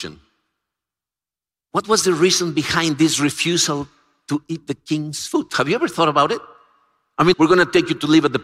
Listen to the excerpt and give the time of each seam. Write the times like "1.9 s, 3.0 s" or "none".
7.3 s